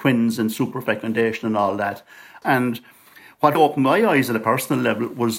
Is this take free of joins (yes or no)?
no